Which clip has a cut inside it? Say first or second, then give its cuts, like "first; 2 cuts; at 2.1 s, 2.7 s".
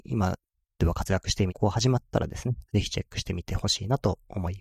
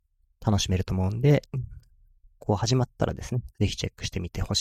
first; 1 cut; at 1.5 s